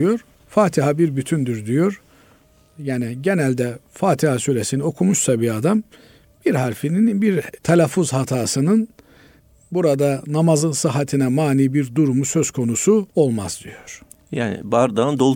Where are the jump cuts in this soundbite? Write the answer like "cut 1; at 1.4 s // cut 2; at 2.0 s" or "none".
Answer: cut 1; at 13.1 s

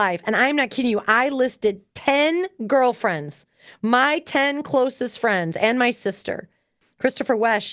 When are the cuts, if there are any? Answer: cut 1; at 6.8 s

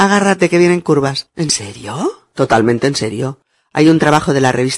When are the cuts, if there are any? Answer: cut 1; at 1.3 s

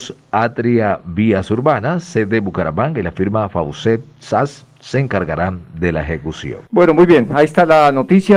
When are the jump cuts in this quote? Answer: cut 1; at 6.7 s

